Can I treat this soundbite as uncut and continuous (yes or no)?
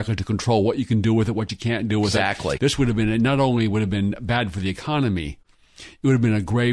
no